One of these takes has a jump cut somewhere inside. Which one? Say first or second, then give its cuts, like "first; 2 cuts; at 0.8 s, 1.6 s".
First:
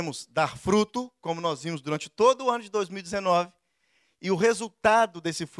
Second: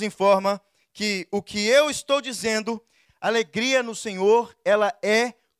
second; 1 cut; at 3.1 s